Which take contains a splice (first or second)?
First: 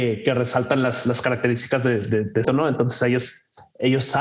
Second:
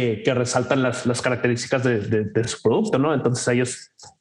first